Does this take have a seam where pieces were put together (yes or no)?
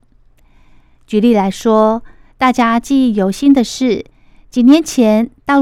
no